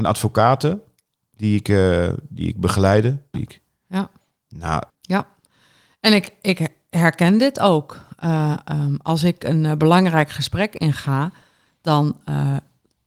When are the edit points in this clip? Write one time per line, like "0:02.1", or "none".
0:03.3
0:04.9